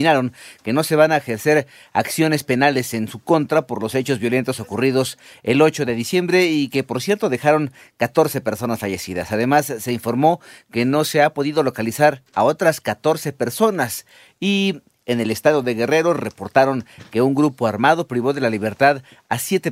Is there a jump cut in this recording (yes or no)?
no